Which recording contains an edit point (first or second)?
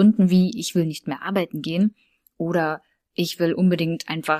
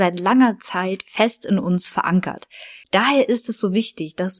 second